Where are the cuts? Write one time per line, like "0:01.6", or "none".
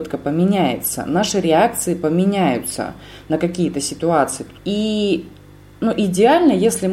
0:04.6